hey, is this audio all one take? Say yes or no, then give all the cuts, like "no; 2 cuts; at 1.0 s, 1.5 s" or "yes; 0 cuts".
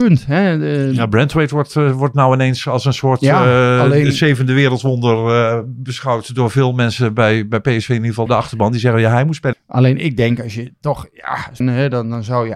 no; 3 cuts; at 8.3 s, 9.5 s, 11.6 s